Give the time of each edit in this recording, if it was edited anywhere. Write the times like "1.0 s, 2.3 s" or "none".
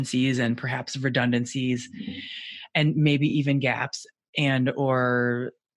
none